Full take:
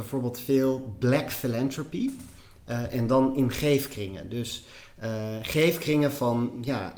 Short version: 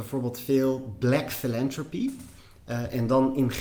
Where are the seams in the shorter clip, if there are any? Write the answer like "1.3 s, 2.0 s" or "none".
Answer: none